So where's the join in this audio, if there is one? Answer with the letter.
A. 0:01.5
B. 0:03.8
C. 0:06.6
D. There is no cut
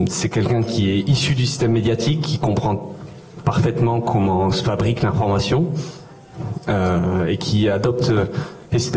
D